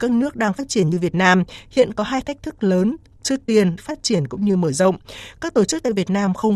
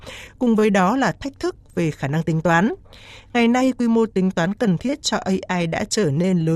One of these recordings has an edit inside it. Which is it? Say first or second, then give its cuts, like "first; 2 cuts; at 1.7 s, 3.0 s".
first; 1 cut; at 3.8 s